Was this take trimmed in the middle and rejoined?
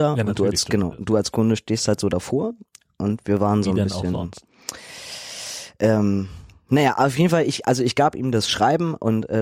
no; 0 cuts

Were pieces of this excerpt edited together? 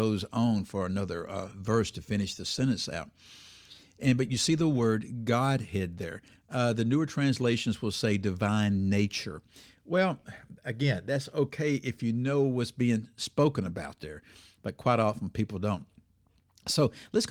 no; 0 cuts

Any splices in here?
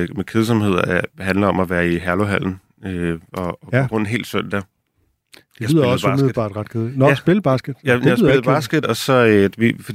no; 0 cuts

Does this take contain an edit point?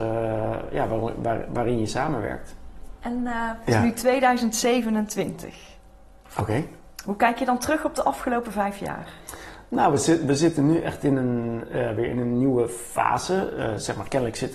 no; 0 cuts

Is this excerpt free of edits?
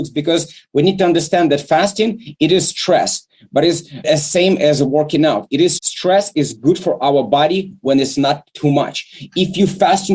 no; 2 cuts; at 4.0 s, 5.8 s

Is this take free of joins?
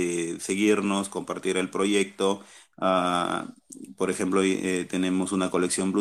no; 1 cut; at 2.7 s

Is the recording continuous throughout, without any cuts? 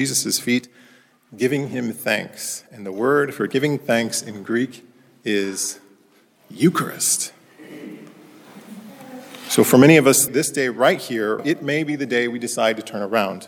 no; 2 cuts; at 10.3 s, 11.4 s

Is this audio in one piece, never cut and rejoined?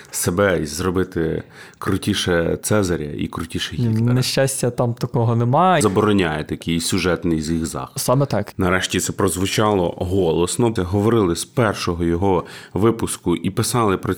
no; 3 cuts; at 5.8 s, 8.5 s, 10.8 s

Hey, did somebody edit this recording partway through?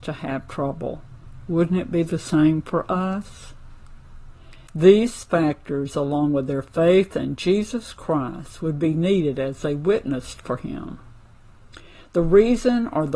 yes; 1 cut; at 4.7 s

